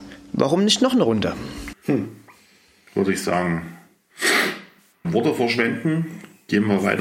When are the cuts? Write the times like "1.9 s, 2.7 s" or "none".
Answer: 1.7 s, 5.0 s